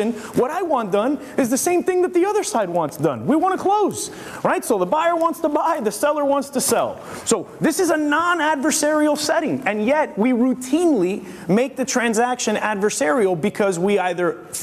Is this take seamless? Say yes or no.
yes